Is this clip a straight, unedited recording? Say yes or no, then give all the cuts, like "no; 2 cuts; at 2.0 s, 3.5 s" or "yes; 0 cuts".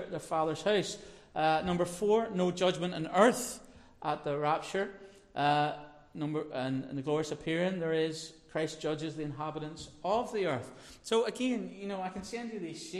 yes; 0 cuts